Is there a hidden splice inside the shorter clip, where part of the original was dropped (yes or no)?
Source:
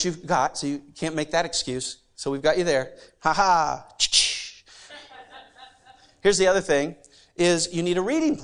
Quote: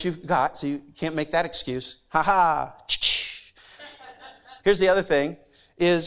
yes